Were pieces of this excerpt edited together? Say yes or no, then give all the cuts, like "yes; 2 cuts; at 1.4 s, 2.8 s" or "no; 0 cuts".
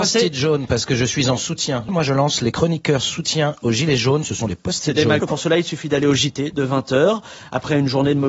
yes; 2 cuts; at 1.9 s, 5.2 s